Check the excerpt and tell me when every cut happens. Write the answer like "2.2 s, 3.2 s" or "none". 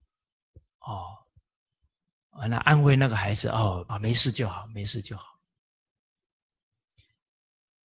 3.9 s